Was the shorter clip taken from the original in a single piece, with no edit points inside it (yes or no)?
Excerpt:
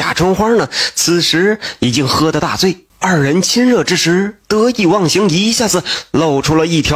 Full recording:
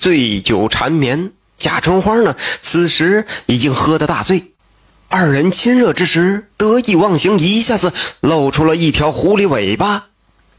no